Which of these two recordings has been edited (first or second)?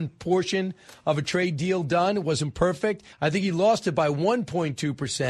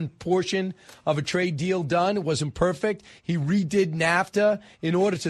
first